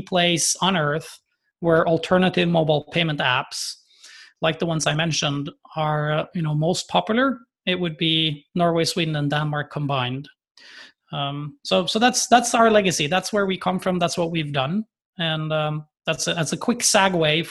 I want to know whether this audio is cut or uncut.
uncut